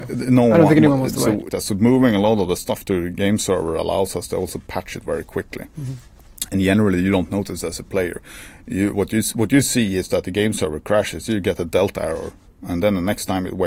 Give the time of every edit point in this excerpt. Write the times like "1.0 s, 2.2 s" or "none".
1.5 s